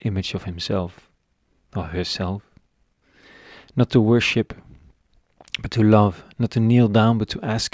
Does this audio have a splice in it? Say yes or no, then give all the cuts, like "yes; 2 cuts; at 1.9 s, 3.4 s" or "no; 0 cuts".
no; 0 cuts